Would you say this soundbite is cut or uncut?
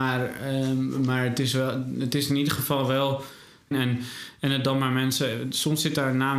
cut